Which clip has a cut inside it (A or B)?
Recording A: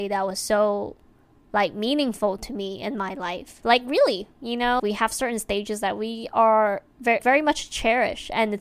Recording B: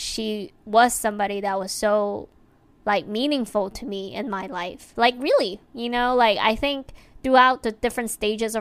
A